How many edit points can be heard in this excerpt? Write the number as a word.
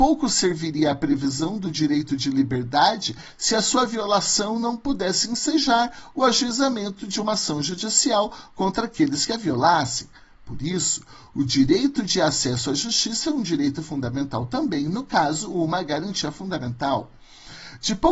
zero